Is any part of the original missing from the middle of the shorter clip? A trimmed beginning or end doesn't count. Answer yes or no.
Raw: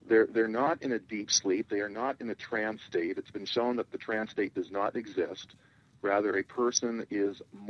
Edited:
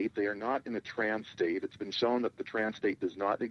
no